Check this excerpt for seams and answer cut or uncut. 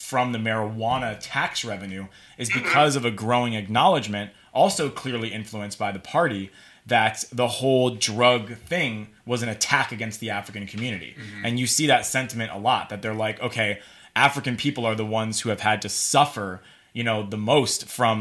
uncut